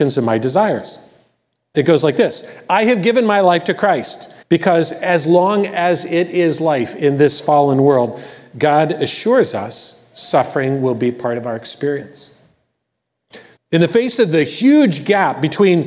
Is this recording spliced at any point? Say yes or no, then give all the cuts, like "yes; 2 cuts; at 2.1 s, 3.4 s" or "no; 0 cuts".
yes; 3 cuts; at 1.7 s, 4.4 s, 13.6 s